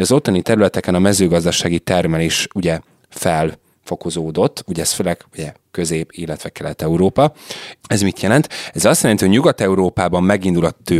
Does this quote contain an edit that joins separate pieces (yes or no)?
yes